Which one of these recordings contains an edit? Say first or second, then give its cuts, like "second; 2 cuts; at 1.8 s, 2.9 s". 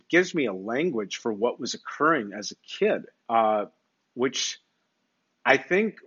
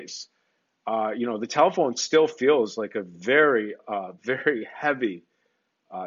first; 1 cut; at 3.2 s